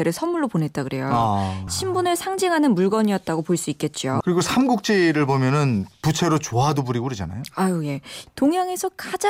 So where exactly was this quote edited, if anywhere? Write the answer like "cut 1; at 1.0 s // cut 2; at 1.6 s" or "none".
cut 1; at 1.7 s // cut 2; at 4.2 s // cut 3; at 8.3 s